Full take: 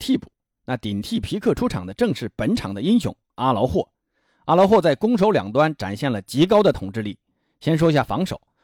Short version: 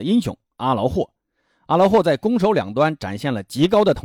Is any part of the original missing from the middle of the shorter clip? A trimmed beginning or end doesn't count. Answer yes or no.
no